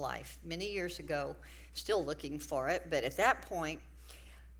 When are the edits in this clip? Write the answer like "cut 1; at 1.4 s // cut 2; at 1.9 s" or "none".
none